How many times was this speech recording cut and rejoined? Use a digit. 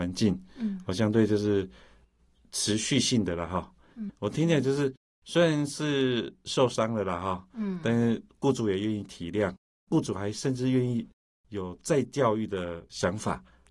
1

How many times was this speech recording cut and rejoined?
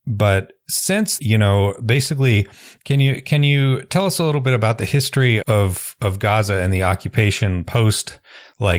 2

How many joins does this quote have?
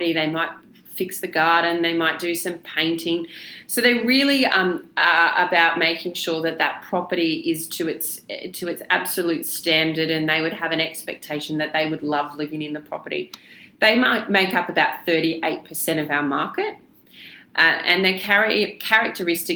0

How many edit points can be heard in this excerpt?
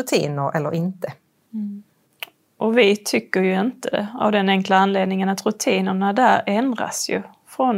0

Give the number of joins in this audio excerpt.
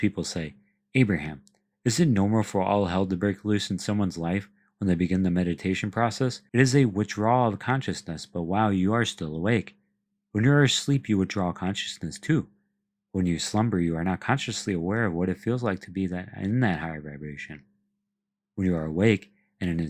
1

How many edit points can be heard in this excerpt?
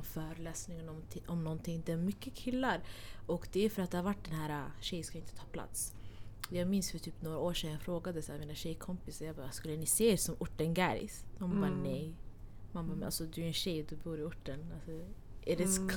0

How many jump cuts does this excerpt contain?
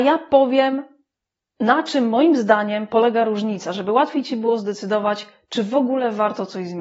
0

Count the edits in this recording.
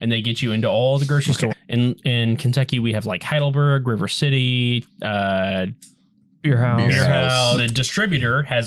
2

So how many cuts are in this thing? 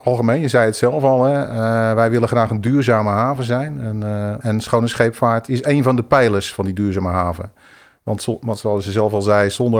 0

